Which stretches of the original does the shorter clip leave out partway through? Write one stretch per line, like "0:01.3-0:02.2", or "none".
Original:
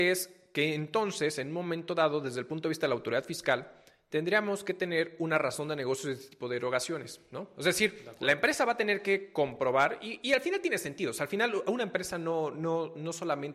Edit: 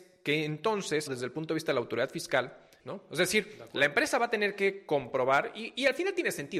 0:01.4-0:02.2
0:03.9-0:07.3